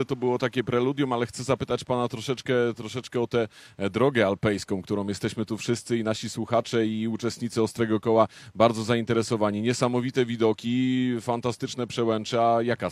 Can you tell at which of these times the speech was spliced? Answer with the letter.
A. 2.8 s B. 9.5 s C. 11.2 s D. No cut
D